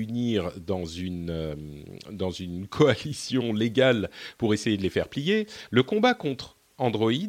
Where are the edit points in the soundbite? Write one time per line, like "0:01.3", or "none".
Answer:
0:05.7